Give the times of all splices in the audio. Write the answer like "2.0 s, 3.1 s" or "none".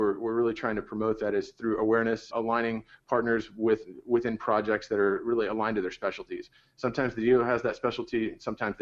2.3 s

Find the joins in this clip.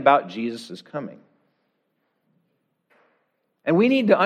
none

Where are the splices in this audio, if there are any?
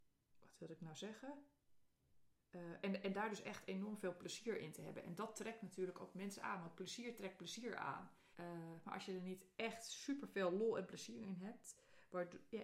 8.3 s

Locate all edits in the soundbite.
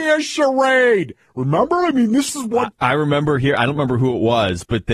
2.8 s

